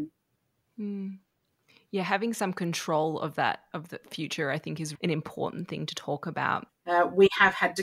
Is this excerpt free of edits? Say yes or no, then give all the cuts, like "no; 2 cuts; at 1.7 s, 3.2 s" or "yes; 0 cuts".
no; 2 cuts; at 4.9 s, 6.7 s